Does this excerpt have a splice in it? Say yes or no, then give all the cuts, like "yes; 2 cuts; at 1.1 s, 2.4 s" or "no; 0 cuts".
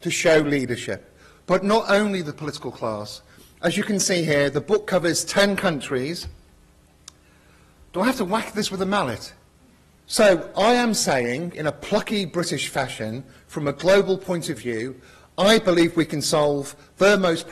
yes; 1 cut; at 10.0 s